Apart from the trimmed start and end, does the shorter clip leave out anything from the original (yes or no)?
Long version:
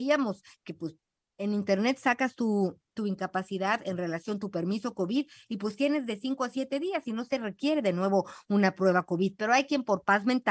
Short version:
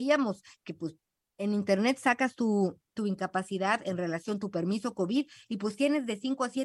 no